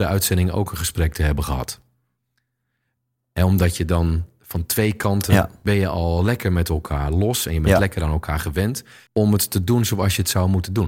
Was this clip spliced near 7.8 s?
no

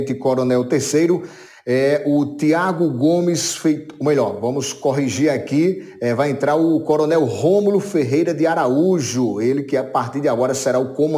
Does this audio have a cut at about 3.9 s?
no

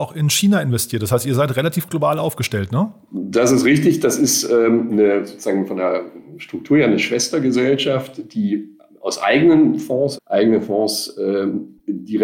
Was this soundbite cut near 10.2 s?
yes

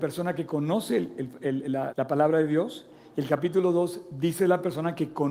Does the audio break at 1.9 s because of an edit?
yes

